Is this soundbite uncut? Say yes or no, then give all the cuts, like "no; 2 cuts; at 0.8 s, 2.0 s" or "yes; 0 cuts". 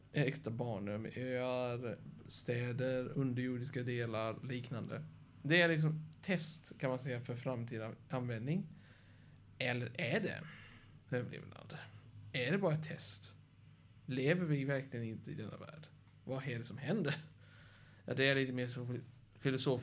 yes; 0 cuts